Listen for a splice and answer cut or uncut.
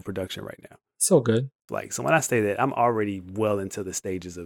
cut